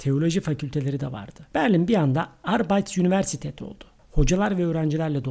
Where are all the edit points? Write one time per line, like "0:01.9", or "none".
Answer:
0:01.5